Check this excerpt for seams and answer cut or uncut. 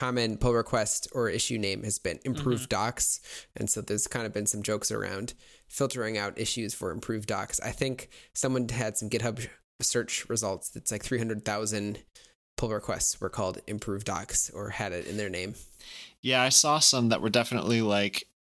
uncut